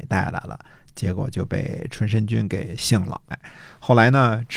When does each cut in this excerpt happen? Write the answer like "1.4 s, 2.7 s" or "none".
3.3 s